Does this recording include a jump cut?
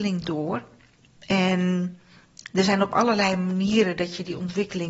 no; 0 cuts

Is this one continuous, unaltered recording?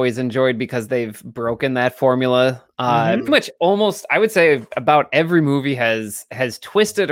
no; 1 cut; at 3.3 s

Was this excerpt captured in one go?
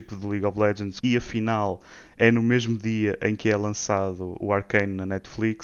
no; 2 cuts; at 1.0 s, 4.4 s

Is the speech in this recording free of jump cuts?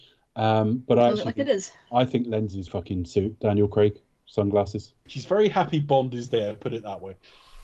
no; 2 cuts; at 2.7 s, 5.1 s

